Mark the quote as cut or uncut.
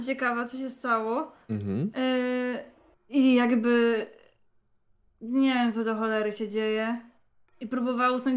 cut